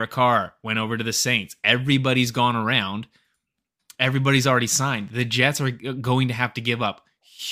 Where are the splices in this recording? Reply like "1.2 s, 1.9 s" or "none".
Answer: none